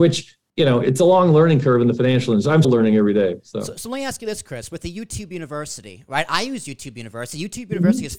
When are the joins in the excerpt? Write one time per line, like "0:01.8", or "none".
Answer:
0:02.6

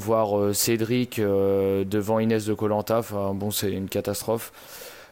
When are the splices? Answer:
none

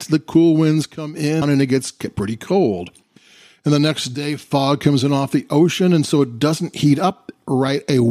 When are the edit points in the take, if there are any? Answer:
0:01.4

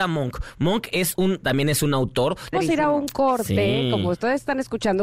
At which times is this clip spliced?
0:01.4
0:02.5

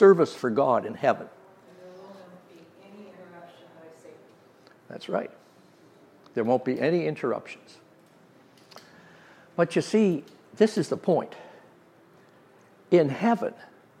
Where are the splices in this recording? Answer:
none

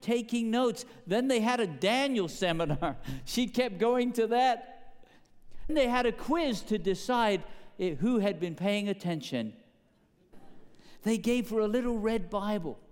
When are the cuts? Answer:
0:05.7
0:10.3

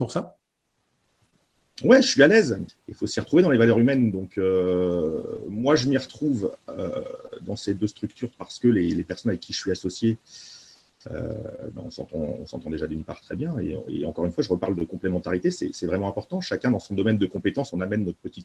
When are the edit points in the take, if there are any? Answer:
0:02.7

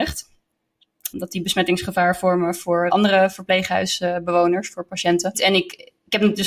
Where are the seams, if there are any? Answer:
0:01.1
0:02.9
0:05.3

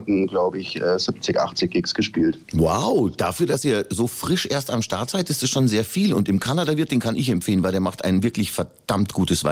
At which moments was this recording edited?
none

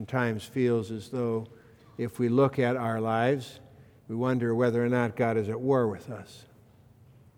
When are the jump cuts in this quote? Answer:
0:04.0

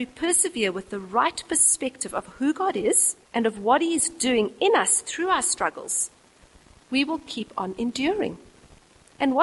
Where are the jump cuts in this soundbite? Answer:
0:03.2

